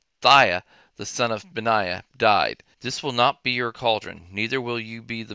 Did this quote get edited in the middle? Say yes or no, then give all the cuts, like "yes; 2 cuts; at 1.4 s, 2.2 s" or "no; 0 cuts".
yes; 1 cut; at 2.7 s